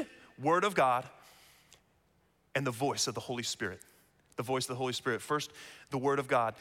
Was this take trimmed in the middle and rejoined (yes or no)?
no